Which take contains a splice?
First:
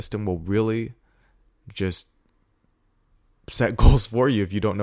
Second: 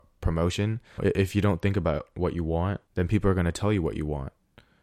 second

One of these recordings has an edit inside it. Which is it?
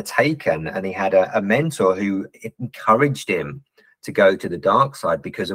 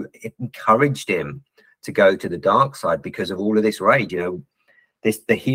second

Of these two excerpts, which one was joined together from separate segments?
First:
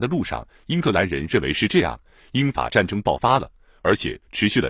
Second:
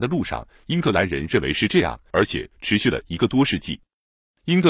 second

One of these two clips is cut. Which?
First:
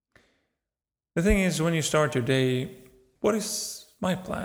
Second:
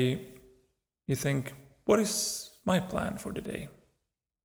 first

